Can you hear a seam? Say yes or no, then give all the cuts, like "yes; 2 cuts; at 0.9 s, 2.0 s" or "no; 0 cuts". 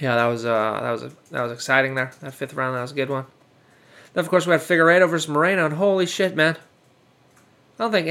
no; 0 cuts